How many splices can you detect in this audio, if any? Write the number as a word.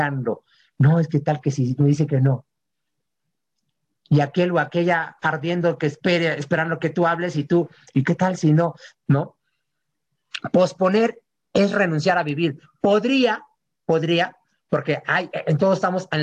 one